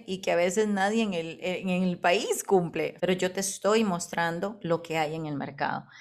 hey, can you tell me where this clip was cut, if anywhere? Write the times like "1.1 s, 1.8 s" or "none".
3.0 s